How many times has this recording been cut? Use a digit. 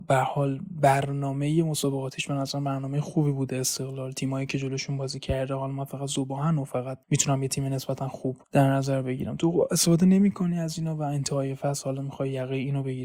2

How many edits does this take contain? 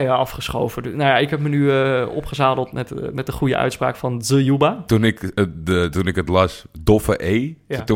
2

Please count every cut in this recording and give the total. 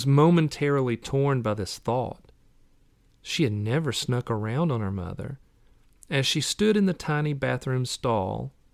1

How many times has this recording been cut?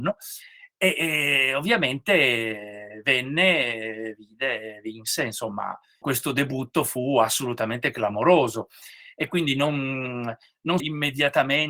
2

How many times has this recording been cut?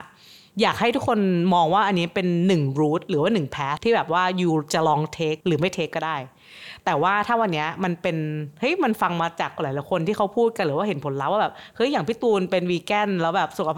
2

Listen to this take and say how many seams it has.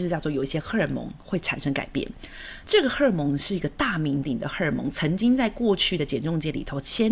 1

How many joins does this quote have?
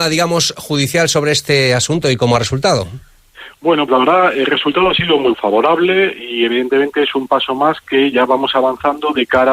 2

